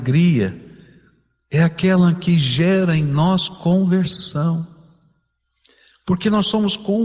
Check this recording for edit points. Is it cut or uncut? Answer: uncut